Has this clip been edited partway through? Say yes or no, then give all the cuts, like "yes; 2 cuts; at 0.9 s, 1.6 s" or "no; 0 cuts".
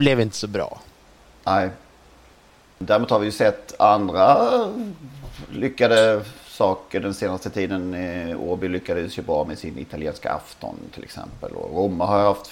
no; 0 cuts